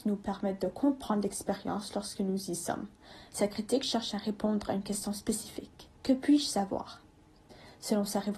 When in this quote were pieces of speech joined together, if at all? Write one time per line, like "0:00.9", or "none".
0:03.3
0:05.9